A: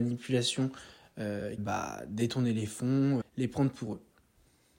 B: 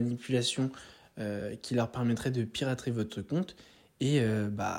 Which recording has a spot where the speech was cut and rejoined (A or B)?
A